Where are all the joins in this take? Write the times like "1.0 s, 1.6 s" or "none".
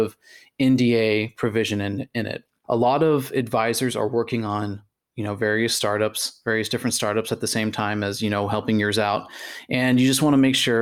none